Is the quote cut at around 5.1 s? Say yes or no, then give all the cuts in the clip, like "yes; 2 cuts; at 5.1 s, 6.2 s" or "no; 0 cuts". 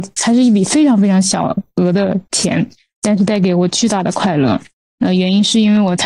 no; 0 cuts